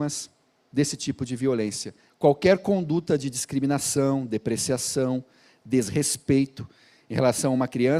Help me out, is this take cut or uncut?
cut